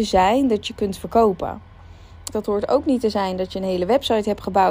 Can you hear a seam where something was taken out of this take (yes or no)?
yes